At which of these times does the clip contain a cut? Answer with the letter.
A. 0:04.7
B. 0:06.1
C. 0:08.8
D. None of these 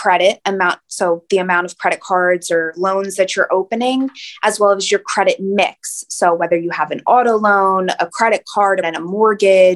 C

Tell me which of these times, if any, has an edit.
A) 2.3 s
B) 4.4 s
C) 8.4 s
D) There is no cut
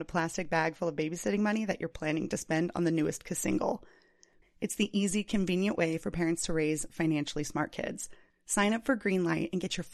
B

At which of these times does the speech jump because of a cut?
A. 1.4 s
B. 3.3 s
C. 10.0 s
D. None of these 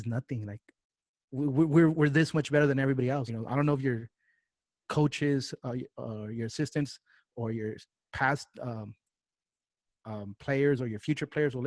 B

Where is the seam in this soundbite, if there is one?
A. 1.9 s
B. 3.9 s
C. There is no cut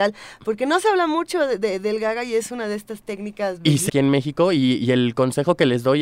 B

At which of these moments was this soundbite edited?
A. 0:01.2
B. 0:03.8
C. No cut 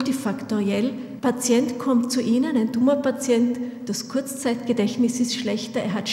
A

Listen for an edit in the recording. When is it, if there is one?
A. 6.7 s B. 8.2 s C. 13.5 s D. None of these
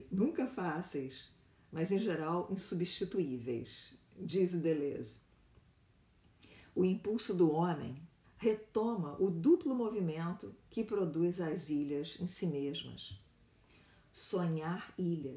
B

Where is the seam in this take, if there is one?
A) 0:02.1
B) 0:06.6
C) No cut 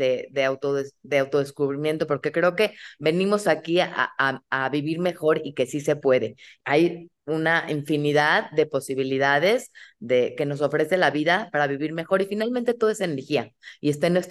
B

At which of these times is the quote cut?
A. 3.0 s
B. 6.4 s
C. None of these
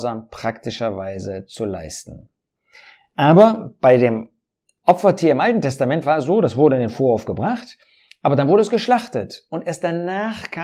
C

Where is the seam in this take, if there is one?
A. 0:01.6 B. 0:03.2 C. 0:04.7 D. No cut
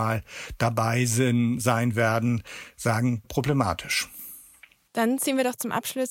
B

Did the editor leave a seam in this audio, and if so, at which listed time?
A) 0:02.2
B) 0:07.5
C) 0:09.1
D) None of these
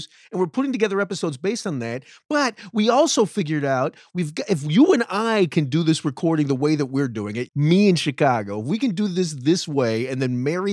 B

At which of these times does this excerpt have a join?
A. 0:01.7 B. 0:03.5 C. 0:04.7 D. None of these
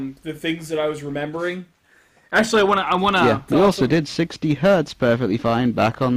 B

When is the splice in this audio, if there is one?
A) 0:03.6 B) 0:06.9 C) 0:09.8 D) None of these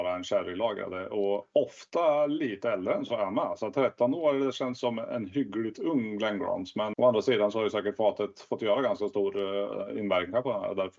B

